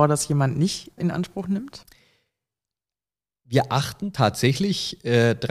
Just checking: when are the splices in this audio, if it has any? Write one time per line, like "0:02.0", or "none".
0:01.0

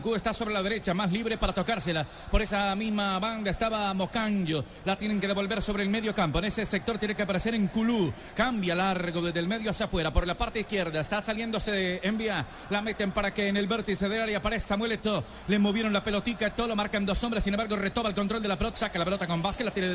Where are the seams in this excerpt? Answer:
0:14.7
0:18.7

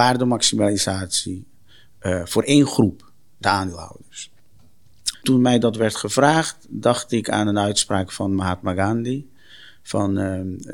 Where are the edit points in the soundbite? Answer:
0:05.1

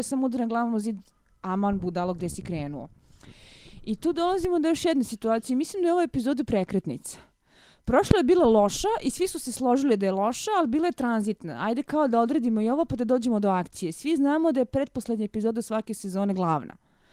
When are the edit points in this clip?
none

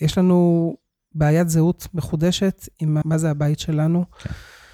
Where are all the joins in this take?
0:03.0

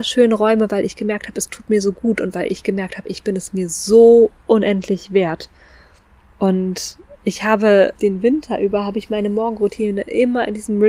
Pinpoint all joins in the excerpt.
0:06.2
0:07.9

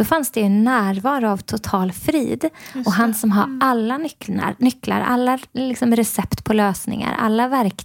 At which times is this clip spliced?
none

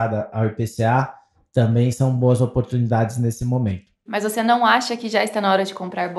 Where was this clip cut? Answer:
0:04.1

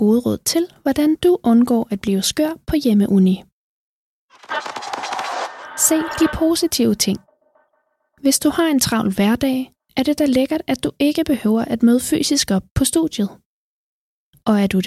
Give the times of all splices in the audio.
none

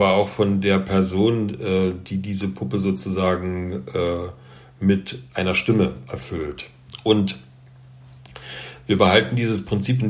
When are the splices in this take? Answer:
none

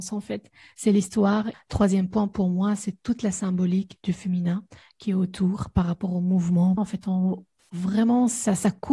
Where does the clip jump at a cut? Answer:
0:01.5
0:06.8

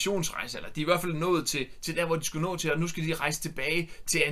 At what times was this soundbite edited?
none

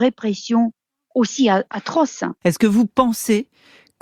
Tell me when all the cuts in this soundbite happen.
0:02.4

